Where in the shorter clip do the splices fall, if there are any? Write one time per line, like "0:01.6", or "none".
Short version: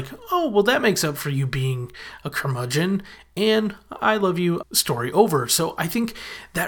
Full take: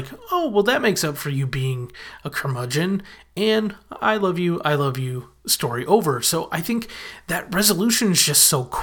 0:04.6